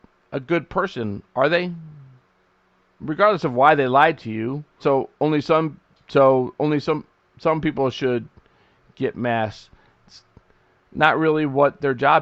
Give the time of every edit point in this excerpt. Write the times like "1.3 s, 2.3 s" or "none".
4.8 s